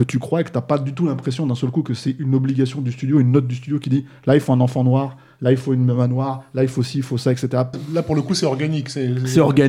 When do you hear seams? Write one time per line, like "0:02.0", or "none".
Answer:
0:07.7